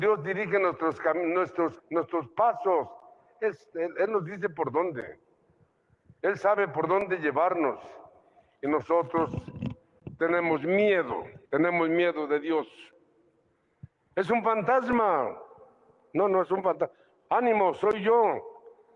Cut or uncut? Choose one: cut